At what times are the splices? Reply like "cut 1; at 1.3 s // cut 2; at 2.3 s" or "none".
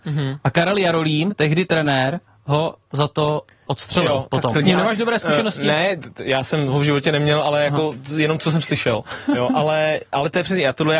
cut 1; at 4.5 s